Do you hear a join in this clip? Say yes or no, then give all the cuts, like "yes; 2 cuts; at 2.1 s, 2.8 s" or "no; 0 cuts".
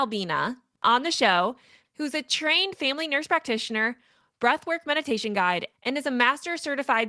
no; 0 cuts